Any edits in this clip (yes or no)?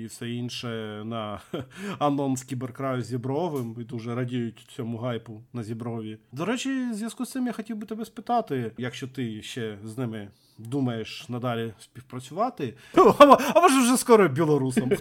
yes